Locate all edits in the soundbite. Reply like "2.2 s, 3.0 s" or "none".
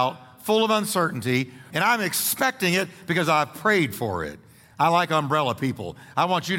1.7 s